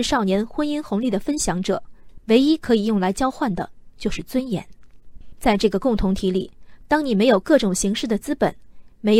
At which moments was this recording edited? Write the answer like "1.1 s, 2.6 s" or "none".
5.3 s